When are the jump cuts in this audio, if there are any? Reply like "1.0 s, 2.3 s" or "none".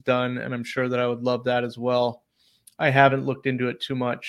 none